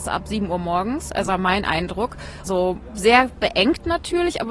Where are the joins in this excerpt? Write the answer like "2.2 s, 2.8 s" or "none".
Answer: 1.3 s, 2.4 s